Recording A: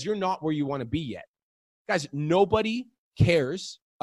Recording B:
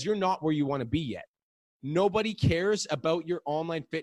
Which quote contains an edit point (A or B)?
B